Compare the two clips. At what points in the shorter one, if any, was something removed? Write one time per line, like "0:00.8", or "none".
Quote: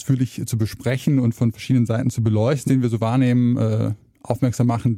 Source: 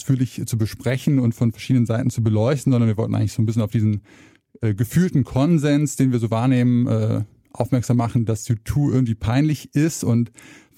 0:02.7